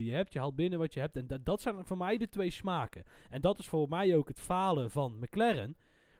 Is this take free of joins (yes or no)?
yes